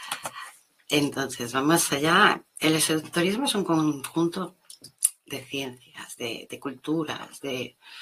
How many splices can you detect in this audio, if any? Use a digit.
1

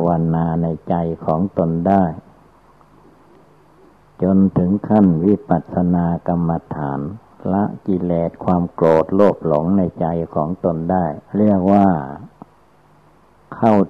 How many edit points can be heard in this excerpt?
1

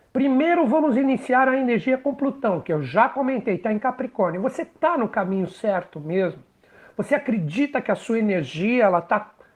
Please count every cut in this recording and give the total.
0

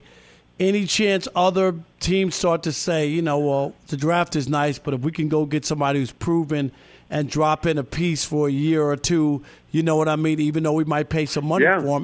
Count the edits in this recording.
0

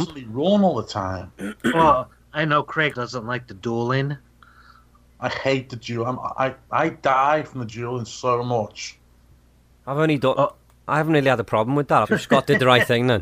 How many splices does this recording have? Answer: 3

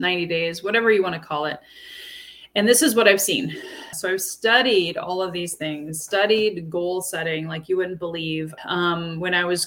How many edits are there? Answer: 2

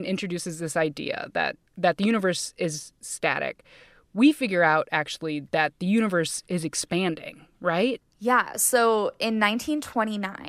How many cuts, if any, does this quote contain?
0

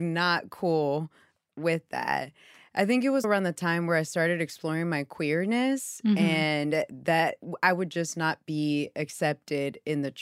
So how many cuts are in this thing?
1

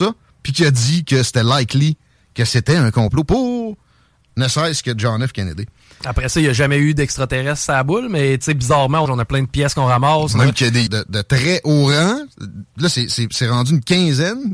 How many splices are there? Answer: 2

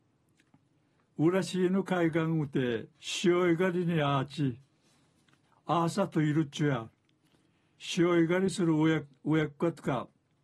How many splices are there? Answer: 2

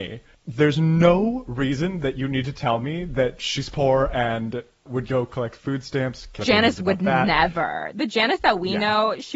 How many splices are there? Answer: 1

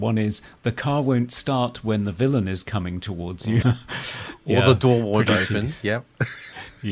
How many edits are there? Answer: 1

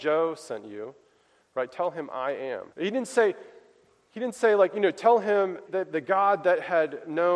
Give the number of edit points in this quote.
2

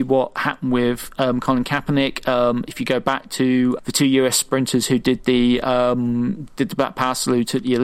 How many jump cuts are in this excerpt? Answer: 1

